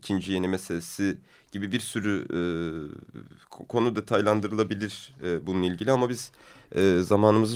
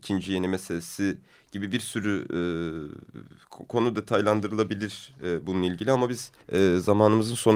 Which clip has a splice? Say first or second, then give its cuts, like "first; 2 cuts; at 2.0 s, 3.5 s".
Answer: second; 1 cut; at 6.4 s